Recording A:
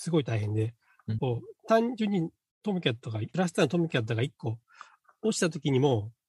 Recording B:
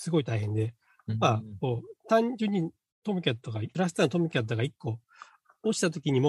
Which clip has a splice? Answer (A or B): A